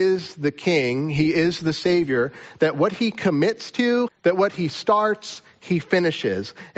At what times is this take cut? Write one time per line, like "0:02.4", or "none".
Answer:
0:04.1